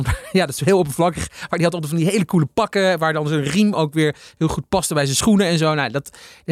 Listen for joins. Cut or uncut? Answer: uncut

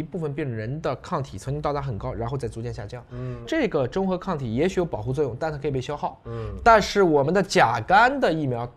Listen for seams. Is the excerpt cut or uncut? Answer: cut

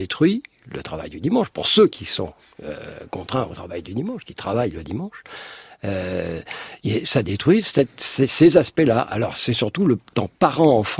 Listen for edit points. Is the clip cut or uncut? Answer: uncut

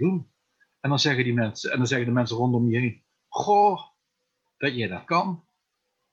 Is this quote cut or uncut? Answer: uncut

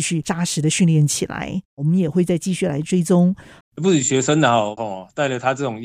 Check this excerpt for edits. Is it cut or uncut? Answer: cut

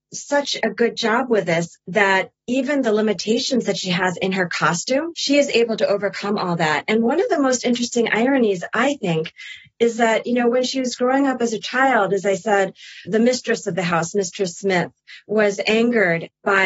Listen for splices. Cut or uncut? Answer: cut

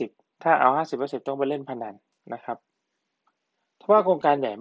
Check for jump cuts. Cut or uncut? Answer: uncut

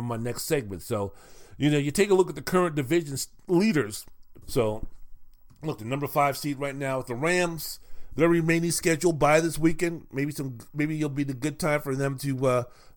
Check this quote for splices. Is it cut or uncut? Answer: cut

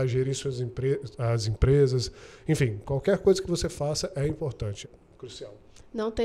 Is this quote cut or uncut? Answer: cut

